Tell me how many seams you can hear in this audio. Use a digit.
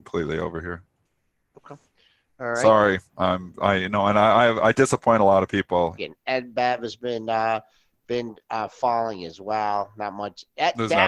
1